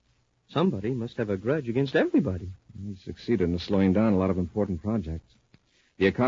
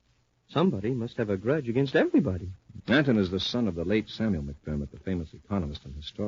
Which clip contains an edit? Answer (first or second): second